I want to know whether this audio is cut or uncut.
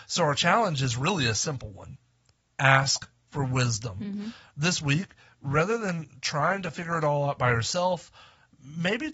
uncut